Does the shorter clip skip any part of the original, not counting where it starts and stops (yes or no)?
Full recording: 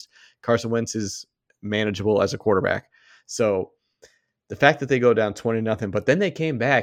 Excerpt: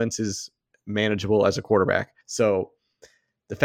yes